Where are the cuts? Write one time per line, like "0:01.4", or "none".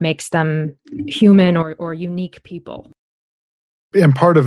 none